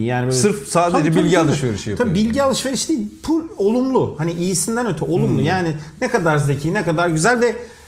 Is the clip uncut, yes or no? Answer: yes